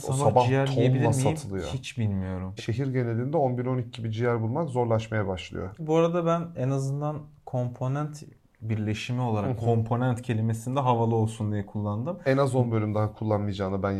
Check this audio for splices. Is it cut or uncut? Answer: cut